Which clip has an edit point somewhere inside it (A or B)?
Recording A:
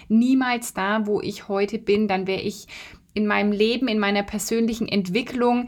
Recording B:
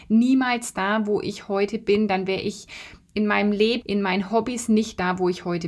B